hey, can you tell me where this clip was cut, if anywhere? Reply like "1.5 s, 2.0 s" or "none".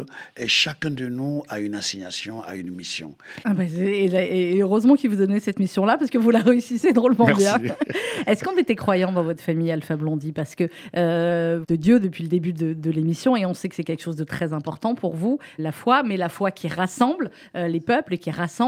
3.4 s, 11.6 s, 15.6 s